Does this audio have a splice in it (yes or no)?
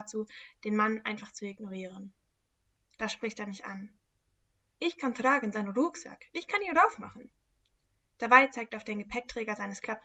no